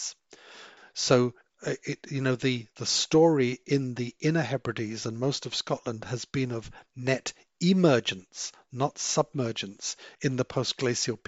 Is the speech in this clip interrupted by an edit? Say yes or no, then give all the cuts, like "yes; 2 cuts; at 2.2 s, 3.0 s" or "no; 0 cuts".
no; 0 cuts